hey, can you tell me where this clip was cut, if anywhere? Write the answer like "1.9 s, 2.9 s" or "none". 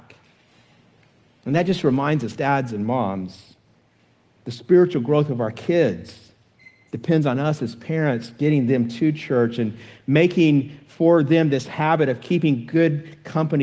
none